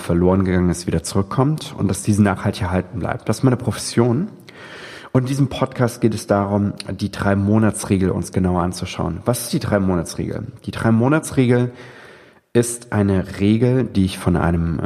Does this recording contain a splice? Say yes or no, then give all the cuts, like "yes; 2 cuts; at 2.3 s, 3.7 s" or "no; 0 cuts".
no; 0 cuts